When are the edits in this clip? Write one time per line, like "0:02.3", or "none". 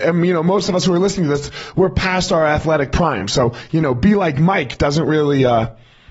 none